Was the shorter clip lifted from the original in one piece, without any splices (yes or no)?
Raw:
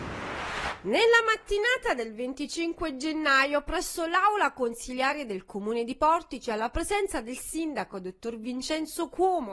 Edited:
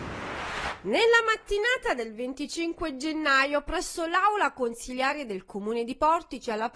yes